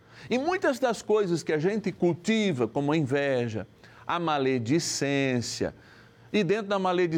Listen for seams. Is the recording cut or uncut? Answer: uncut